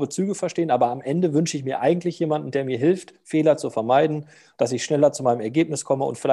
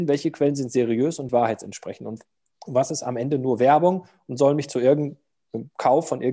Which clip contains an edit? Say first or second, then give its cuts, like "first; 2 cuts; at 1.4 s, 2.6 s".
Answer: second; 1 cut; at 1.3 s